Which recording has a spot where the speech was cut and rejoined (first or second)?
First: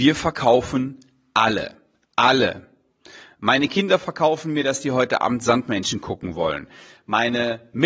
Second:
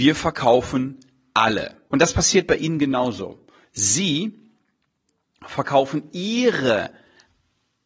second